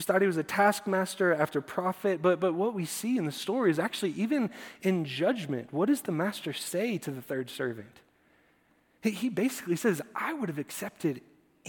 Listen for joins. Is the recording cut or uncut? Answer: uncut